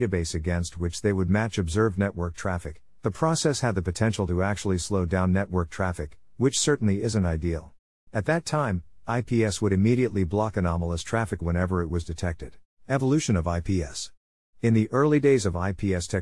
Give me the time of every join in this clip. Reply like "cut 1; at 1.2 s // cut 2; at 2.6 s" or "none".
cut 1; at 8.1 s // cut 2; at 12.7 s